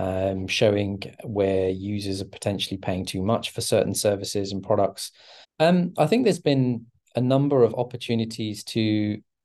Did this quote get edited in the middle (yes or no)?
yes